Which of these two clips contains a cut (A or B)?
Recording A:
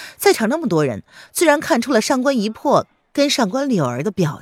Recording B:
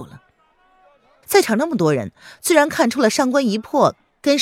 B